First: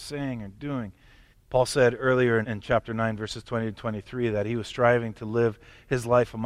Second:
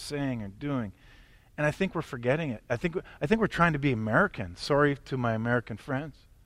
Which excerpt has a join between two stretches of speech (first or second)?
first